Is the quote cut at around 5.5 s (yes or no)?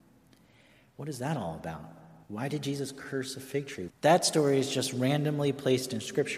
no